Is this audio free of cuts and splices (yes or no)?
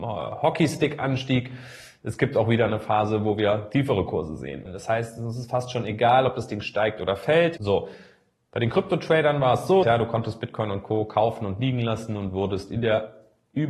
no